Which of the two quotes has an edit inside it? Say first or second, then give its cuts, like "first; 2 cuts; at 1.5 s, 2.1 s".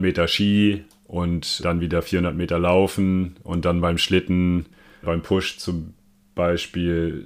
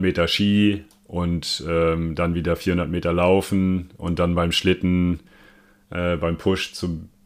first; 2 cuts; at 1.6 s, 5.0 s